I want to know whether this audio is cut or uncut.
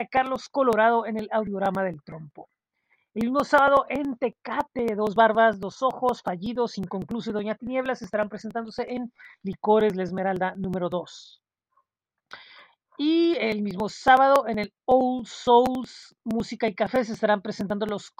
uncut